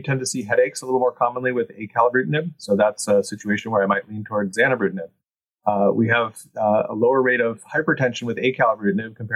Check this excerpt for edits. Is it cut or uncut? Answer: uncut